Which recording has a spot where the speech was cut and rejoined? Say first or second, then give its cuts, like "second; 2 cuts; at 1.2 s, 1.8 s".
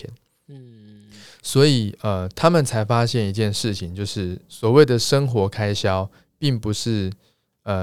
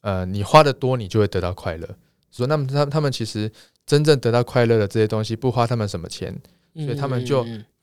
second; 1 cut; at 2.4 s